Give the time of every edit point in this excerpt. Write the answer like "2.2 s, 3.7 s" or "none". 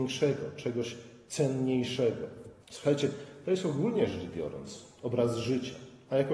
2.6 s